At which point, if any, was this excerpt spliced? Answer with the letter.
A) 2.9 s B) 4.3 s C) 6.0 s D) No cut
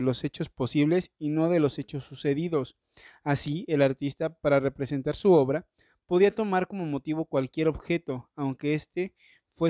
D